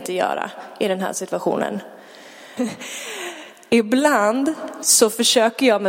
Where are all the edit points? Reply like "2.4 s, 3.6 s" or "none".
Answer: 2.6 s